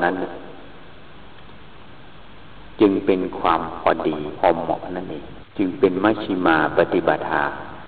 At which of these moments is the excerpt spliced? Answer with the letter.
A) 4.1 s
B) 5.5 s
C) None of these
B